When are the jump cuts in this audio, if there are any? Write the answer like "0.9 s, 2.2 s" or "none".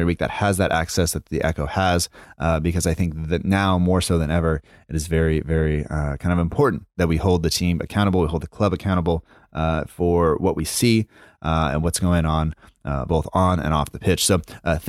none